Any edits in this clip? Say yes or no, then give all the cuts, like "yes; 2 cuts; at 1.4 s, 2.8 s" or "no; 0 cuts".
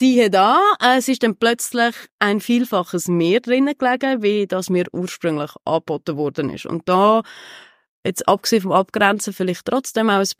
no; 0 cuts